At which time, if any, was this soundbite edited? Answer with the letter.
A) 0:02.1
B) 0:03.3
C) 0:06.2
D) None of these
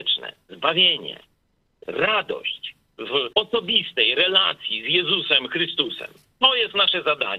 B